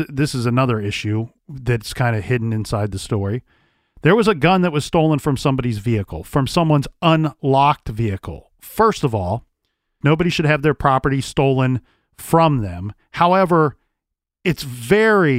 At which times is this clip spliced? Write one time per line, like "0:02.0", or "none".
0:10.0